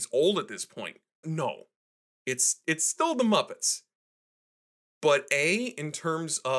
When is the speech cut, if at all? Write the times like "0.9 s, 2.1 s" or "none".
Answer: 1.2 s